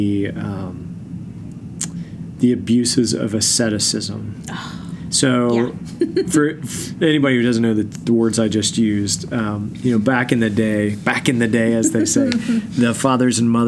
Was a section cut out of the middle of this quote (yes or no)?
no